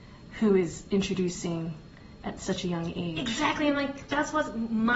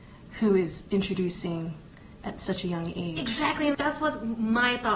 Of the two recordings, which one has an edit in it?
second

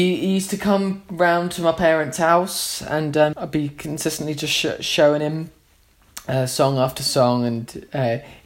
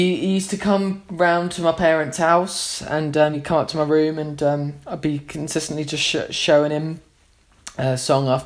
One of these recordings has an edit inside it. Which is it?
first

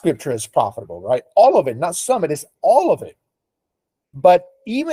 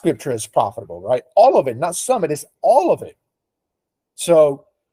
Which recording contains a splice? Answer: first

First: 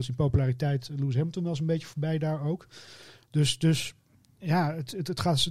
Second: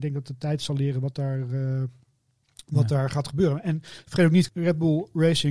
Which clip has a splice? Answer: second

